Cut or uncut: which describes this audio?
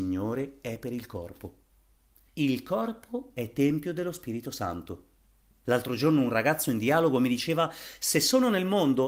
cut